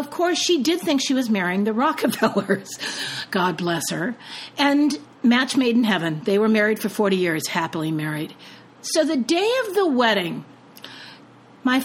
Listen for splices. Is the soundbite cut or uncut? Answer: cut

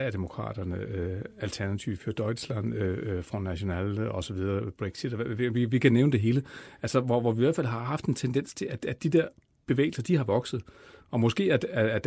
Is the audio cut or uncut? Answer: uncut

